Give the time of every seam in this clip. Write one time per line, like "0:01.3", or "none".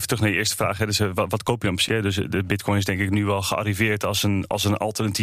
0:01.9